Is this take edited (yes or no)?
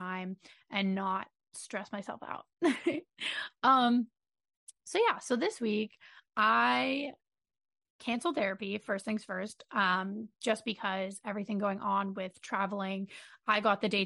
no